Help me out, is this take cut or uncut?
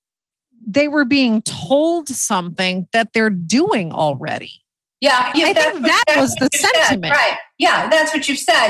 cut